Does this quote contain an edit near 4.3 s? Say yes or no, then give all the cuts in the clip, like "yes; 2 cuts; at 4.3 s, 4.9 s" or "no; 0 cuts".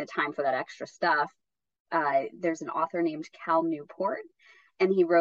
no; 1 cut; at 1.9 s